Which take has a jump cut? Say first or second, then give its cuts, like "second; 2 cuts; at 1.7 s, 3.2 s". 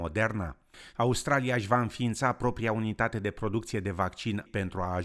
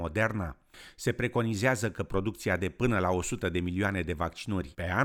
first; 1 cut; at 0.9 s